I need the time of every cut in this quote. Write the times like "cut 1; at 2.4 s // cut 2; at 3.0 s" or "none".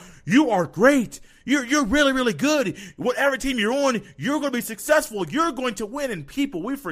none